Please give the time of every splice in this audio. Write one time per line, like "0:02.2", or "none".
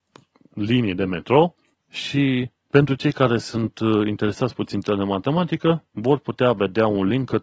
0:01.7
0:05.9

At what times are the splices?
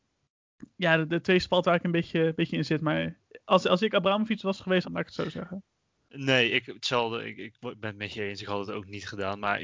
0:04.8

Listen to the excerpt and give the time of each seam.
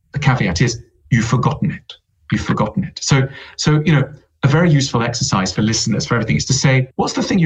none

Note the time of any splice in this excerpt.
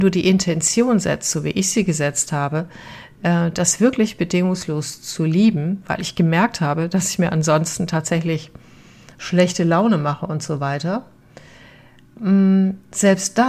none

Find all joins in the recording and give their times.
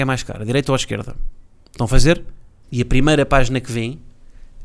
0:02.6

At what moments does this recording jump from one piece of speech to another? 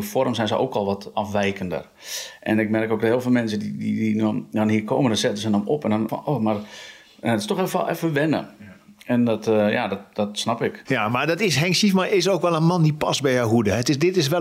0:06.1
0:10.9

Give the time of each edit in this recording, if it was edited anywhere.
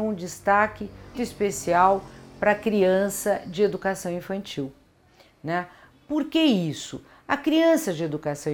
0:01.1

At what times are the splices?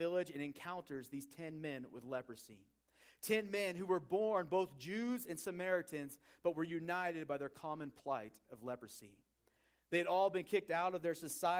none

